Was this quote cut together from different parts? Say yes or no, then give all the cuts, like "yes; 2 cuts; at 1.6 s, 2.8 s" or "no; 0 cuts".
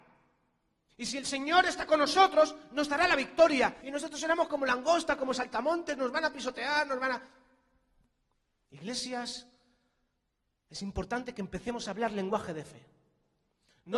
yes; 1 cut; at 3.8 s